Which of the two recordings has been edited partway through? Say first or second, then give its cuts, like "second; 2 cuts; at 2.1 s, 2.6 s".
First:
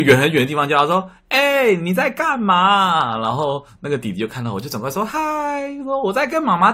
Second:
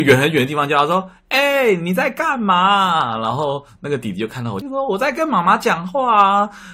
second; 1 cut; at 4.6 s